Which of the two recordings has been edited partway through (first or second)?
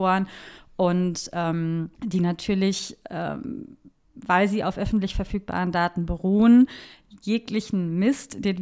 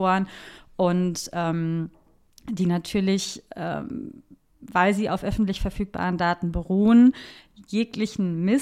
first